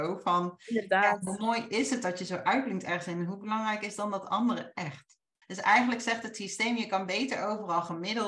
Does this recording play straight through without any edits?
no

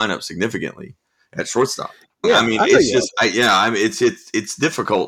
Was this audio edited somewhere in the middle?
yes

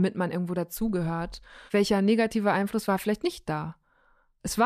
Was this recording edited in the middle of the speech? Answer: yes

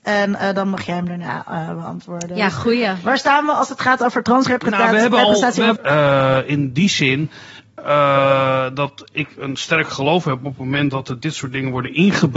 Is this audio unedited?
no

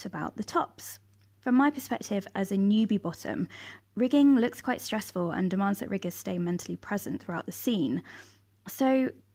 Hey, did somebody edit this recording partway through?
no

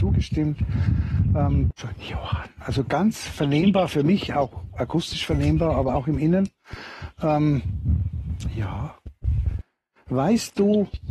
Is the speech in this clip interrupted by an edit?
yes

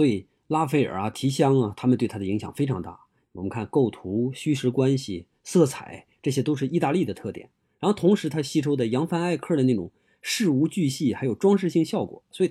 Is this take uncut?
yes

